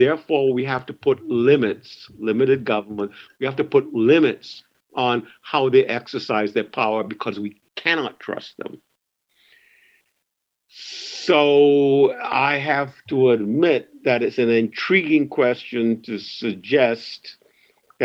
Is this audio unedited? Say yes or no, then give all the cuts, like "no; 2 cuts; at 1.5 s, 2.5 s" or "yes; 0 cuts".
yes; 0 cuts